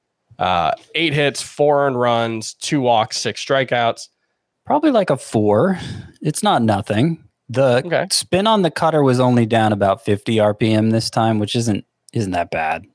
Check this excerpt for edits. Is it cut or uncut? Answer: cut